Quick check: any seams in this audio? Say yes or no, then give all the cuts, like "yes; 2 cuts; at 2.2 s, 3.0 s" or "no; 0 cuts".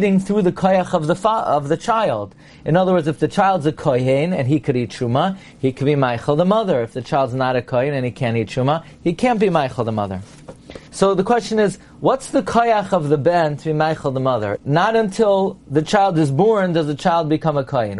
yes; 2 cuts; at 10.9 s, 14.6 s